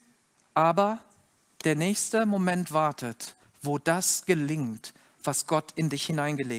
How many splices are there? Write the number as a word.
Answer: one